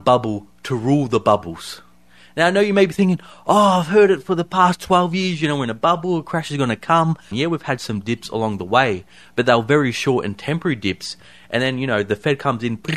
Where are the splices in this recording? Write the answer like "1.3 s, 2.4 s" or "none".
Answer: 7.3 s